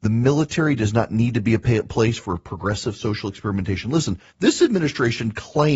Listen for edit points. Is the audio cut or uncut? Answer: cut